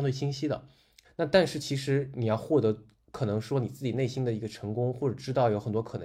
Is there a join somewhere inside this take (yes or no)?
yes